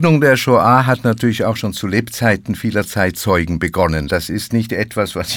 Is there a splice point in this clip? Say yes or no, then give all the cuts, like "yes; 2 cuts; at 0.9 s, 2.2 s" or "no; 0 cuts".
no; 0 cuts